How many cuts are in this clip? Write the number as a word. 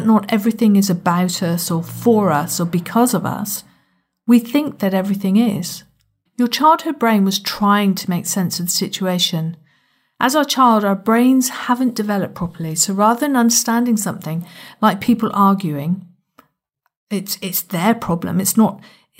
one